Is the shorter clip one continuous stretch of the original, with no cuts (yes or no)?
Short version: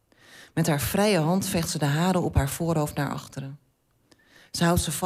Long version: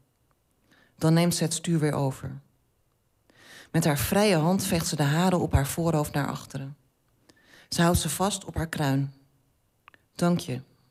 yes